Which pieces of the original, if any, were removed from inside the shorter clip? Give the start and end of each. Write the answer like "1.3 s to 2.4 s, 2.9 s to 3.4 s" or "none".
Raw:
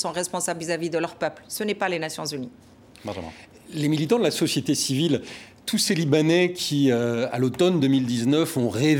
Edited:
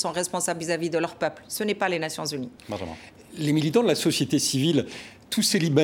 2.6 s to 2.9 s